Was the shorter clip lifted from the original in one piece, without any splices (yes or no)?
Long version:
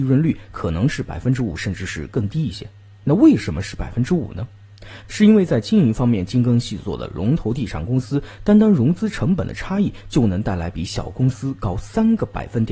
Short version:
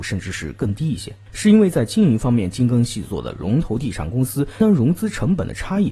no